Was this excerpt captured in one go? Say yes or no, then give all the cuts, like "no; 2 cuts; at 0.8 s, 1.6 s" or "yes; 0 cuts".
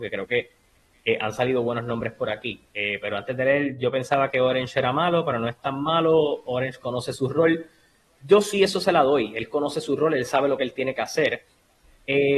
yes; 0 cuts